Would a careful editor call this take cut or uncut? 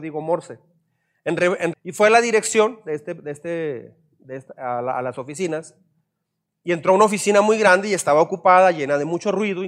cut